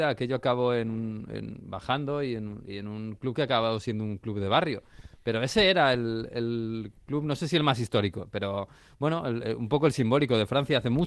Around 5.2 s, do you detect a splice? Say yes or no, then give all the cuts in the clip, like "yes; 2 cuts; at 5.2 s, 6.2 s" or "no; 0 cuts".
no; 0 cuts